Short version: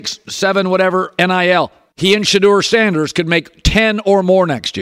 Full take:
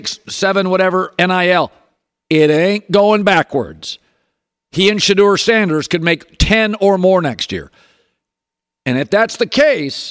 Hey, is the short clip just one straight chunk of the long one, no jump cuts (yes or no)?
no